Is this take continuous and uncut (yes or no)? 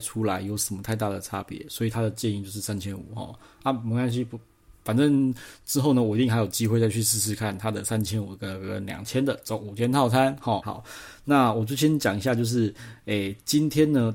no